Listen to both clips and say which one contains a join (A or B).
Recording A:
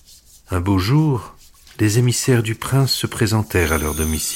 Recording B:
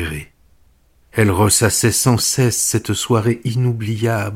A